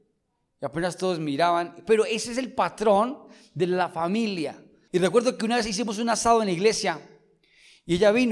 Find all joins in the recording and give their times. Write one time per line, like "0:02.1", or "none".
0:04.9